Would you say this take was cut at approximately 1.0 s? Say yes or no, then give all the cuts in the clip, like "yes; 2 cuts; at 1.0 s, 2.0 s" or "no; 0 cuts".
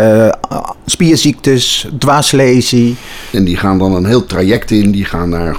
no; 1 cut; at 3.3 s